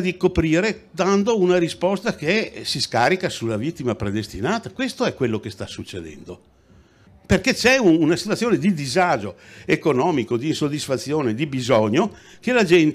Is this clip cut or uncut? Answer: cut